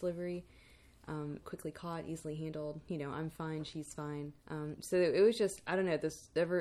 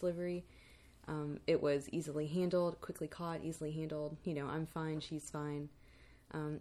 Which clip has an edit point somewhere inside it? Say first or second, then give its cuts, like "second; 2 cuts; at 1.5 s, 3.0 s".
first; 2 cuts; at 1.4 s, 4.4 s